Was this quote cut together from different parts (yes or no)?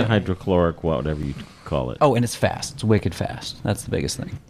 yes